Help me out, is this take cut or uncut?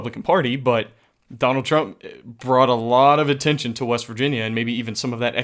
uncut